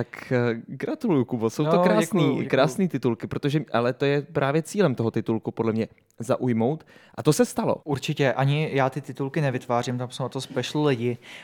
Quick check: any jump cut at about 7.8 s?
yes; 1 cut; at 7.8 s

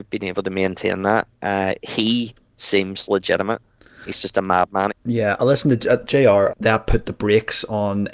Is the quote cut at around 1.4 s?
no; 2 cuts; at 4.9 s, 6.5 s

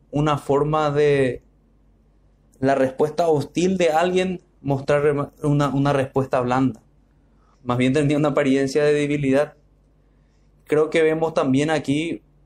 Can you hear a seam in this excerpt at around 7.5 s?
yes; 2 cuts; at 2.5 s, 7.5 s

